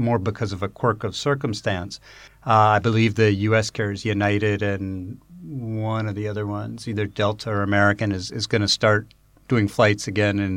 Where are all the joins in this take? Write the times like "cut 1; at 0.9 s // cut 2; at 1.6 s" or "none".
cut 1; at 2.3 s